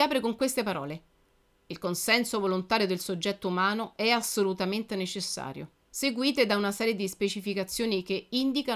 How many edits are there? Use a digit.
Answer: 1